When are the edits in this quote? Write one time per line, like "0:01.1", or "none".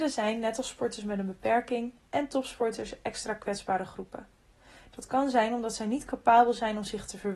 0:02.0